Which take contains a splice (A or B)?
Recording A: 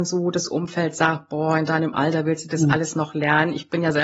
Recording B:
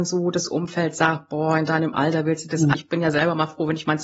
B